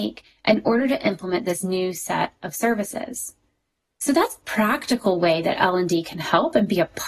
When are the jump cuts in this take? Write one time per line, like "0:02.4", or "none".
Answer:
none